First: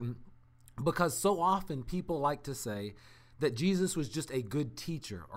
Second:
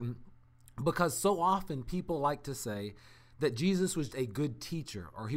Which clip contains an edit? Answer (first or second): second